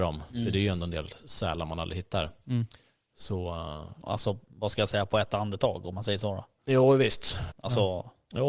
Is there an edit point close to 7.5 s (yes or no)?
yes